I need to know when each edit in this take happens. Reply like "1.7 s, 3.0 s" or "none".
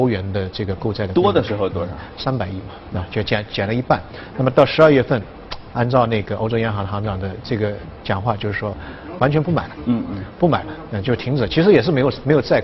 none